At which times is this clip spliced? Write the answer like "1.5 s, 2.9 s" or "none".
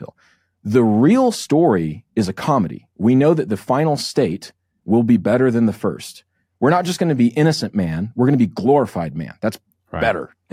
none

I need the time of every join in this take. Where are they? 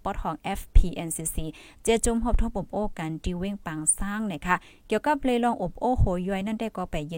none

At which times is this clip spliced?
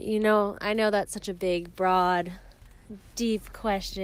none

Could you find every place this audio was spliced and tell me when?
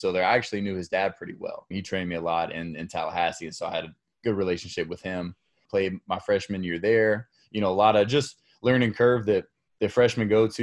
1.7 s, 5.7 s

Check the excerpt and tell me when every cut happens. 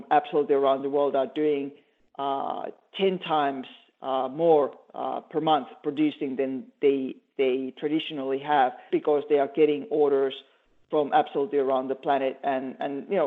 8.9 s

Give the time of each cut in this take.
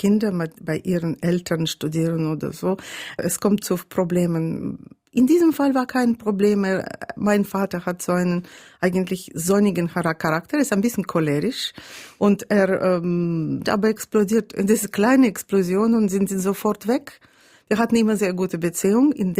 13.6 s, 18.2 s

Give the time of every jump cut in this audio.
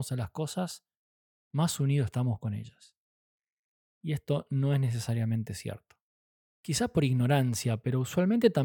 6.5 s

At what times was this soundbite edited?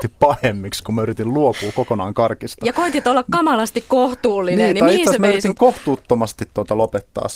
none

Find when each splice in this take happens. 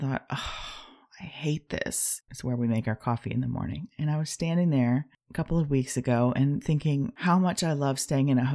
2.3 s

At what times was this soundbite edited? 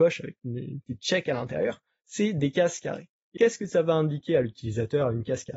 3.4 s

